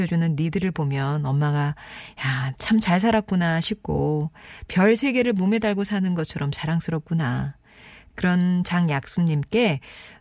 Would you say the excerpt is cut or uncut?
cut